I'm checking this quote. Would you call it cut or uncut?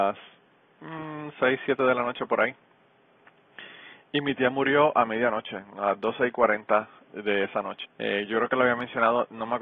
cut